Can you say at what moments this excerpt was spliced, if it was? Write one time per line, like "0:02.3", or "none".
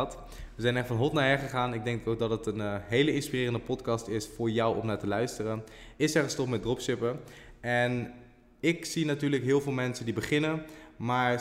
0:05.9